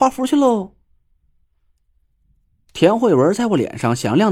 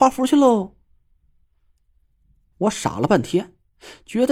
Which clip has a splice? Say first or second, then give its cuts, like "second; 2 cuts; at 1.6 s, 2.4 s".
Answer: second; 1 cut; at 2.5 s